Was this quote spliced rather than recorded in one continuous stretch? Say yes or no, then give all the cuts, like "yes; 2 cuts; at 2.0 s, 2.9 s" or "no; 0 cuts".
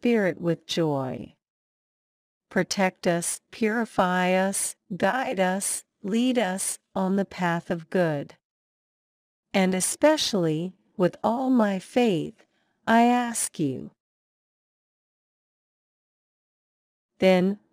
no; 0 cuts